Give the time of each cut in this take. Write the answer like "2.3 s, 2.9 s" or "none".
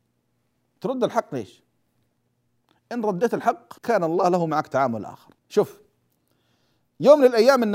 3.8 s, 5.4 s